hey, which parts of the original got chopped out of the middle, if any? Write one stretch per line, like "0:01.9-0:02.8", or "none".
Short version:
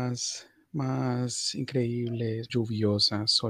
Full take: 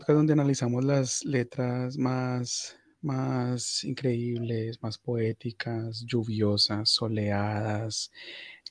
0:04.8-0:06.1